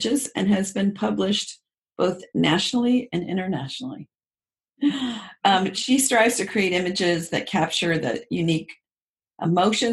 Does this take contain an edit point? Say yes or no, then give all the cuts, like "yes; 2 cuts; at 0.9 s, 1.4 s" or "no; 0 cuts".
yes; 1 cut; at 4.7 s